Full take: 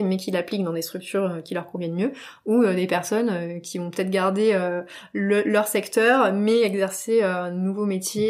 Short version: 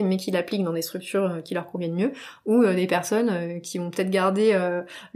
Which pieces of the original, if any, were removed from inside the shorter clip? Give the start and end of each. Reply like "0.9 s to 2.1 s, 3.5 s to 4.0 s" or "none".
none